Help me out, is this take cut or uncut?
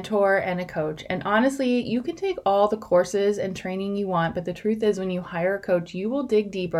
uncut